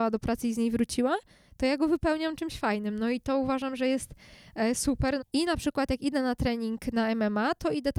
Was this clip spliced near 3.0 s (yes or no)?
no